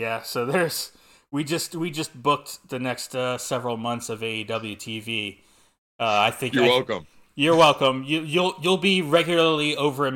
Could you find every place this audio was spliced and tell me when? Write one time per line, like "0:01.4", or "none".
none

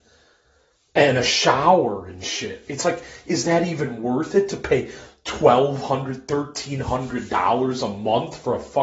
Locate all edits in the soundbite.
none

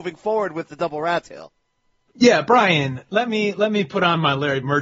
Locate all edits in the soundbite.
none

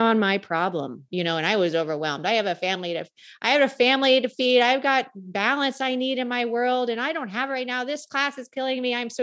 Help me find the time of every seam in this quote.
0:01.1

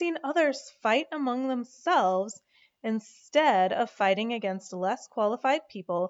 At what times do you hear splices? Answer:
none

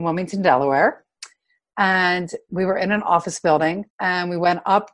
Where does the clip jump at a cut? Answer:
0:03.9

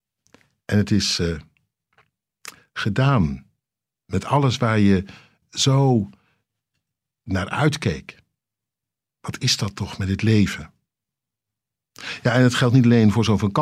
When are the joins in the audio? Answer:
0:05.4

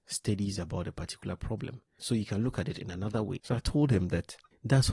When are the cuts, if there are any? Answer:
0:02.0
0:03.4

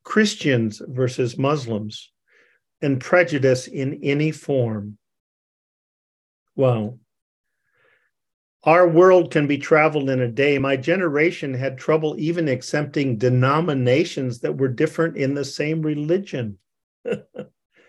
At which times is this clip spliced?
none

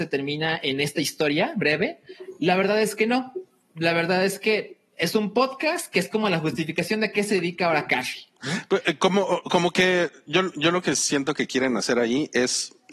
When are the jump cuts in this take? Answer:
none

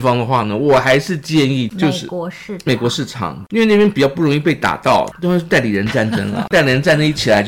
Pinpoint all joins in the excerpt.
0:05.1

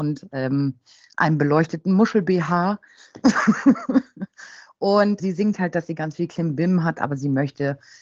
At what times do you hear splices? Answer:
0:05.2

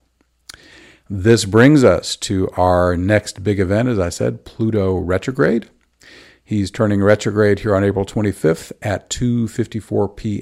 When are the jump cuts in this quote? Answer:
none

